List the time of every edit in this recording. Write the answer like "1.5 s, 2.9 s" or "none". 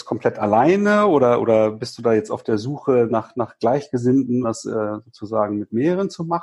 4.4 s